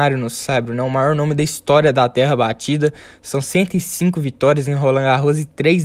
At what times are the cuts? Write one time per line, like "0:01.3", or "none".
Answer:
none